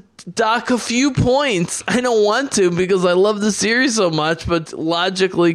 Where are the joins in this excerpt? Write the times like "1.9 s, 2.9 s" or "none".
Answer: 4.7 s